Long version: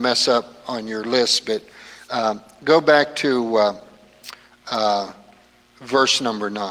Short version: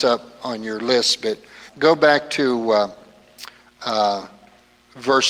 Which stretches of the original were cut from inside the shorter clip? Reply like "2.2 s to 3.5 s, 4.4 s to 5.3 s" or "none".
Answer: 1.9 s to 2.5 s